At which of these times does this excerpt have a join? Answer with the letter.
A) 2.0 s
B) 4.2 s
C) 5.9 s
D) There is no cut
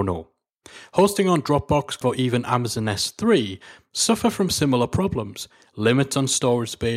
A